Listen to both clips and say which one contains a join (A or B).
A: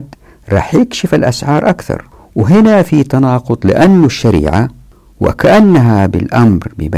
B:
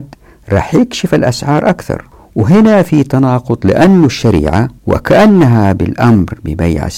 B